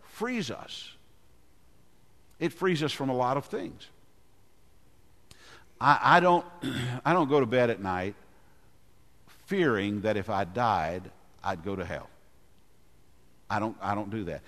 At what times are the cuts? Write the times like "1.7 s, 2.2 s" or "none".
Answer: none